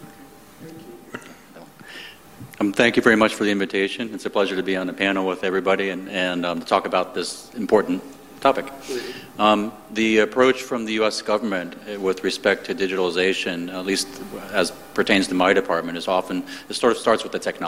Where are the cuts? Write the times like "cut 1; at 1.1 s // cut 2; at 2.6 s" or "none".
none